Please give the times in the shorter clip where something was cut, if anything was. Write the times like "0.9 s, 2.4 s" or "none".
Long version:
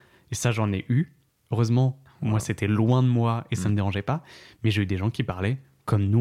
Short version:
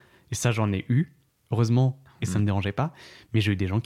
2.2 s